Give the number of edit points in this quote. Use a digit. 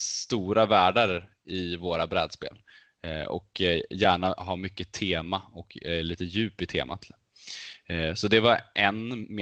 0